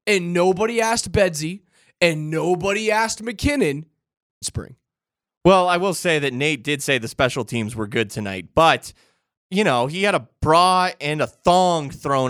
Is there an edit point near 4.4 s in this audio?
yes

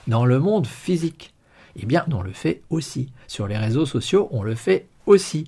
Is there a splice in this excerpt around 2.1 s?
yes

